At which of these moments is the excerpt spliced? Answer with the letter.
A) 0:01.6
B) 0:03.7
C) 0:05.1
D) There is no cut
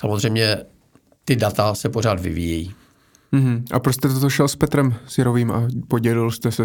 D